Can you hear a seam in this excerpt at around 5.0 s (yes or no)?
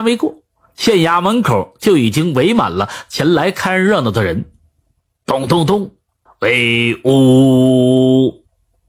no